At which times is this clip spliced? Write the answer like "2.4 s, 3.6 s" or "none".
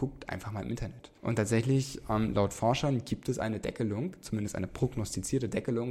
1.2 s